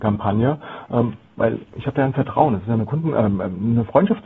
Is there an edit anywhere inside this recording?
no; 0 cuts

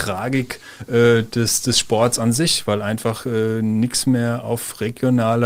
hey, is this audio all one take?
yes; 0 cuts

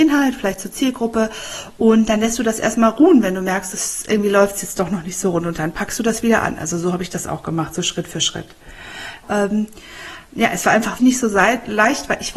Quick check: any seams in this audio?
yes; 2 cuts; at 9.2 s, 11.0 s

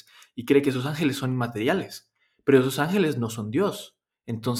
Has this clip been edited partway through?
no; 0 cuts

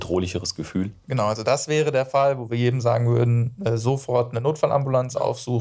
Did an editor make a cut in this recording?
no; 0 cuts

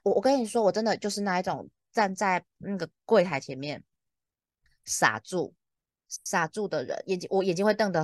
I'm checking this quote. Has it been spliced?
no; 0 cuts

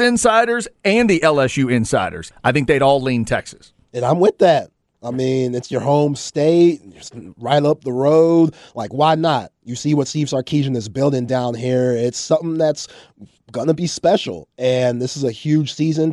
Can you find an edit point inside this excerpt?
yes; 1 cut; at 2.3 s

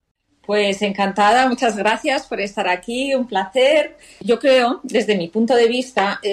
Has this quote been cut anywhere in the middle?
no; 0 cuts

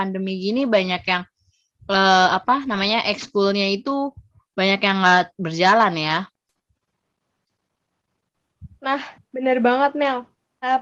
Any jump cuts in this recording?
no; 0 cuts

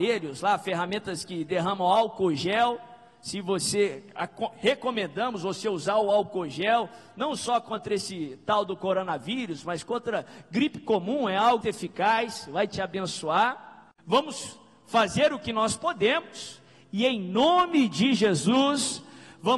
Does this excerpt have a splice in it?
yes; 2 cuts; at 11.6 s, 14.0 s

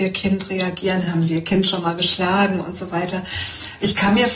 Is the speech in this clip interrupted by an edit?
no; 0 cuts

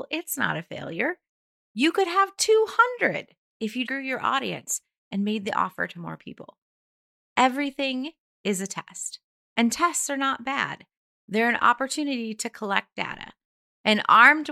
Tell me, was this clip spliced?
yes; 1 cut; at 3.9 s

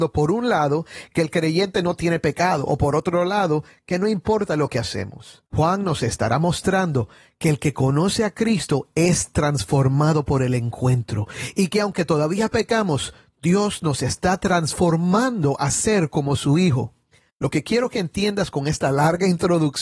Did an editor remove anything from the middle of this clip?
yes; 2 cuts; at 5.5 s, 17.3 s

